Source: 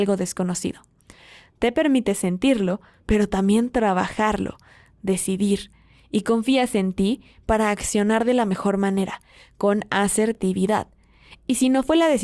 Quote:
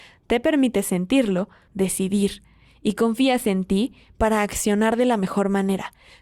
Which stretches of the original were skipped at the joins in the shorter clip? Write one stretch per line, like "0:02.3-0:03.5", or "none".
0:03.0-0:05.0